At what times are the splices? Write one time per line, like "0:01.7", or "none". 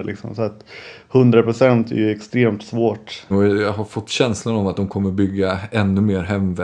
0:03.3